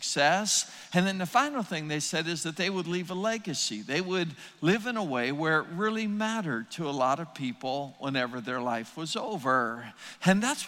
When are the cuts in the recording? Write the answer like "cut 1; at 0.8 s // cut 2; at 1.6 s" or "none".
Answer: none